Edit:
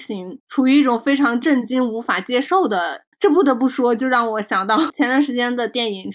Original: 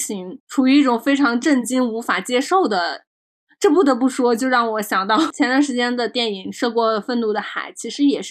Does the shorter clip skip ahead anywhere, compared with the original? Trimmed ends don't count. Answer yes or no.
yes